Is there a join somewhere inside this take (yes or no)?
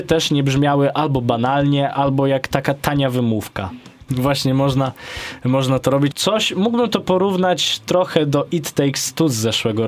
yes